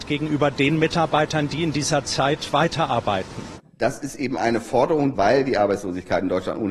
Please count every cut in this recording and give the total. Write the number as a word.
two